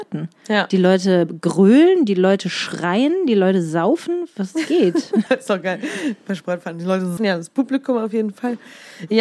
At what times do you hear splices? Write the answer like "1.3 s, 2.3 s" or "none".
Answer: 5.3 s, 7.2 s